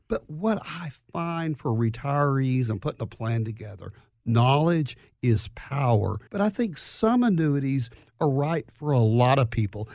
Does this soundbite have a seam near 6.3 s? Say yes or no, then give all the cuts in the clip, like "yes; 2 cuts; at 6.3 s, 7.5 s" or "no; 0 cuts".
yes; 1 cut; at 6.3 s